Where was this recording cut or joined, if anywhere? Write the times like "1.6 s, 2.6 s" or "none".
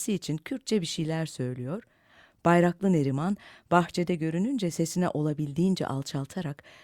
none